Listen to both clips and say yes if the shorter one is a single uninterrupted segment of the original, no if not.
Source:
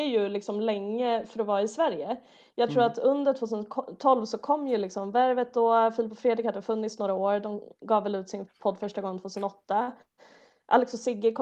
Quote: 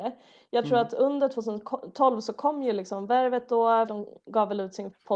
no